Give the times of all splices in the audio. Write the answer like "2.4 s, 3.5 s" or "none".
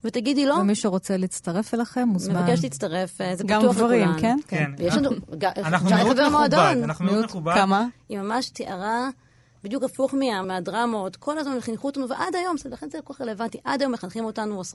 7.9 s, 10.4 s

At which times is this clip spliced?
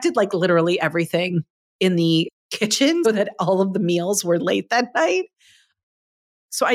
3.0 s

